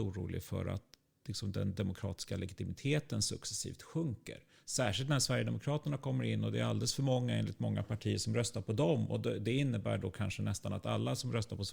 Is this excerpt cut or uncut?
uncut